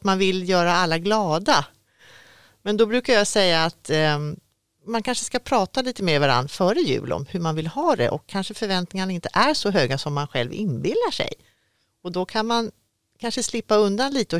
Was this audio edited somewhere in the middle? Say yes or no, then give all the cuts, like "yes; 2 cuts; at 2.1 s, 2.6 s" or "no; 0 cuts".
no; 0 cuts